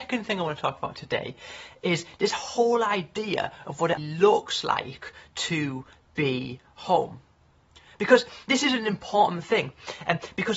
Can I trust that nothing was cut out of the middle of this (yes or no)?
no